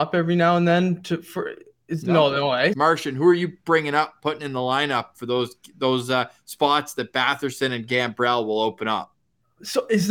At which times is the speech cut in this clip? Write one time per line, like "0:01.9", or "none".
0:02.7